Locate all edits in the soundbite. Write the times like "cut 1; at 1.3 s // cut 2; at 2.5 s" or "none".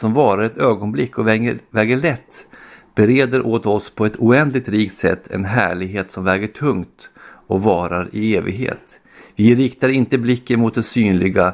none